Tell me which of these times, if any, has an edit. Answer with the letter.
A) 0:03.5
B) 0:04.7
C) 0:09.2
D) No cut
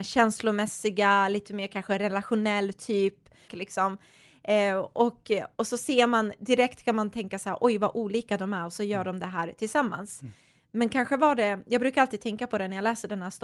A